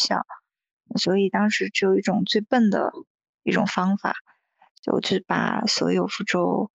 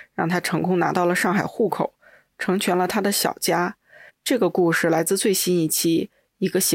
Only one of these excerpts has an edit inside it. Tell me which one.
second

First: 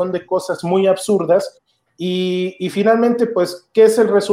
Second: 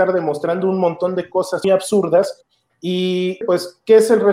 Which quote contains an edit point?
second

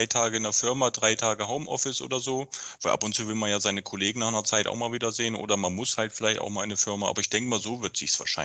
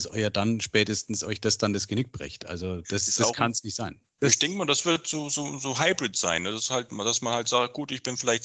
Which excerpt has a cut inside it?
second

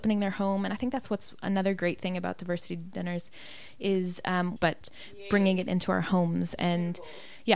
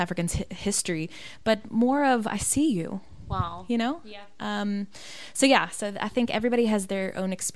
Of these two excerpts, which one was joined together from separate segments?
first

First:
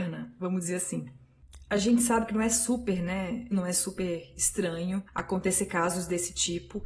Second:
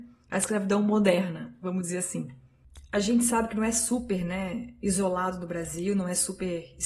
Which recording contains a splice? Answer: first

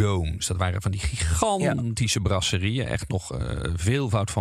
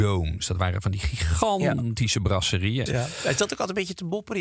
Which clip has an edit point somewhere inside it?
second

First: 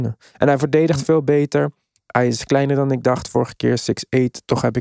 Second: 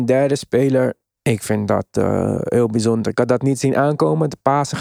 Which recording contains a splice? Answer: second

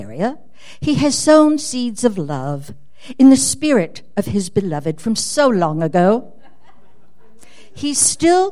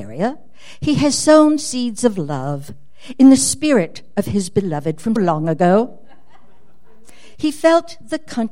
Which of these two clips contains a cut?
second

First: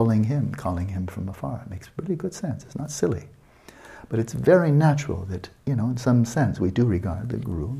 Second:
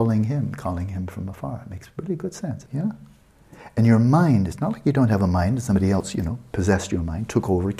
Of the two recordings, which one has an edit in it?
second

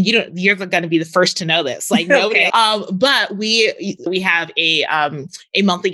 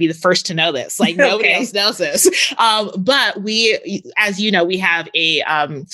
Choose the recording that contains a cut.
first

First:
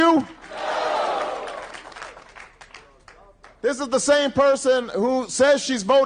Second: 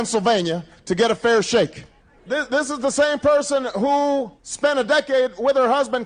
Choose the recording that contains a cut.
second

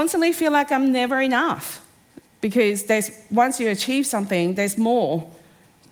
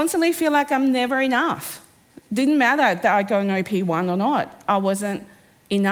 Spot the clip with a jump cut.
first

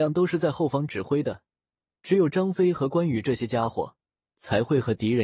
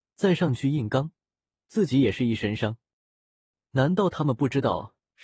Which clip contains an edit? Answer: second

